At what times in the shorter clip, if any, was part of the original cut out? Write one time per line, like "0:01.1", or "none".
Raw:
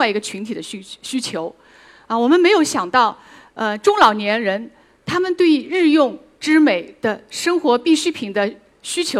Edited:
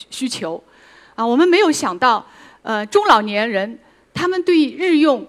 none

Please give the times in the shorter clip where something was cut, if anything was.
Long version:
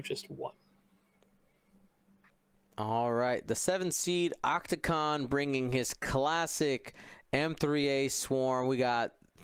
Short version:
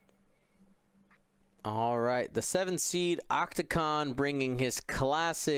none

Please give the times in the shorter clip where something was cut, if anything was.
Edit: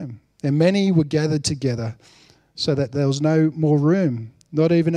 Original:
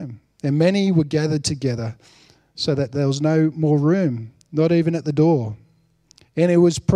none

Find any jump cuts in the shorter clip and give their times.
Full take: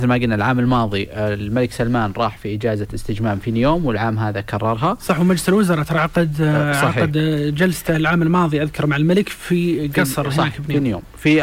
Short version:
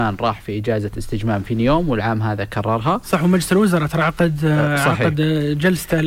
none

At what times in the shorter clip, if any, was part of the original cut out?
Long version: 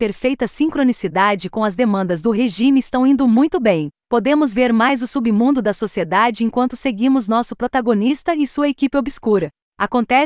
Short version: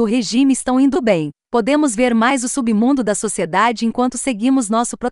0:00.9

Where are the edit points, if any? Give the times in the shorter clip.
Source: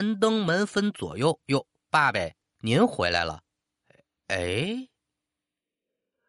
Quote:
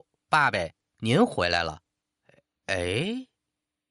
none

